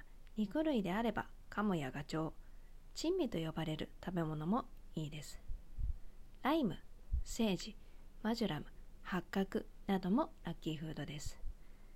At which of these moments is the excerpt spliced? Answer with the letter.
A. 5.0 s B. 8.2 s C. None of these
C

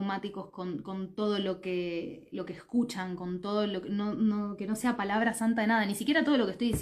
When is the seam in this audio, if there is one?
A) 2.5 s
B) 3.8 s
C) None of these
C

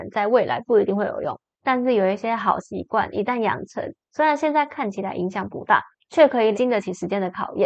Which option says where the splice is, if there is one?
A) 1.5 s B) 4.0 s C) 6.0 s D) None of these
A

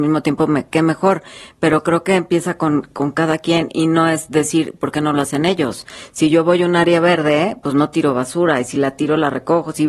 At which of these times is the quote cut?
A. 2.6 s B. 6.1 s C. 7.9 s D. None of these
D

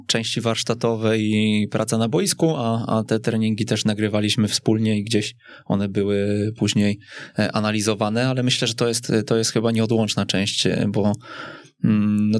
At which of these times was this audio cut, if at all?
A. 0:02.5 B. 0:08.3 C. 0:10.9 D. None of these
D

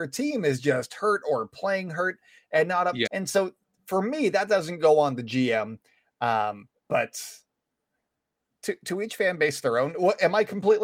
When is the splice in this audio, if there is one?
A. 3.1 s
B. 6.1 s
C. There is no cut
A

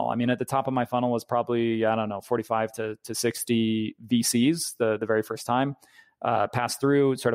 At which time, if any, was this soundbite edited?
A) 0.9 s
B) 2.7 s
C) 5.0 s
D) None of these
D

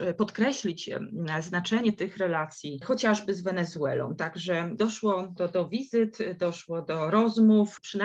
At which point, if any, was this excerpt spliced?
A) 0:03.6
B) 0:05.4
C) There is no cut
B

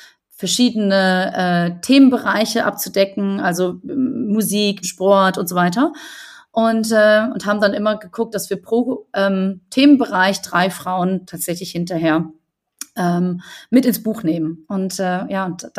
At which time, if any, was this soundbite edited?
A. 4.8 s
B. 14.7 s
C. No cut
A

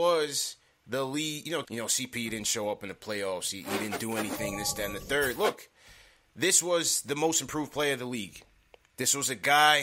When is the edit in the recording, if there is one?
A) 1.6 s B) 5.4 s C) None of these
A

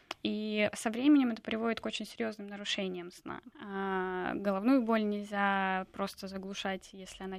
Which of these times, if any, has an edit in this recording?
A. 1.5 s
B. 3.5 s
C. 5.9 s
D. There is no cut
B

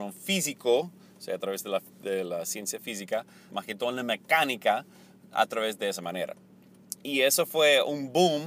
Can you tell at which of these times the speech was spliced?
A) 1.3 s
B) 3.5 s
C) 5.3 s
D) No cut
B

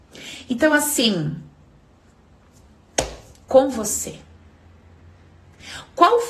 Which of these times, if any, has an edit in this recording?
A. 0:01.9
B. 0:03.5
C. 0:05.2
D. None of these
B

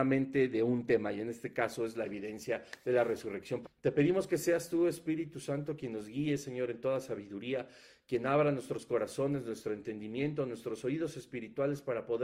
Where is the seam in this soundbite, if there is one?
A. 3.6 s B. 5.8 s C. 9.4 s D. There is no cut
A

